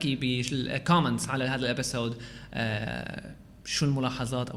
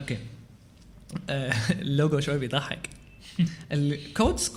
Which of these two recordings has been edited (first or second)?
second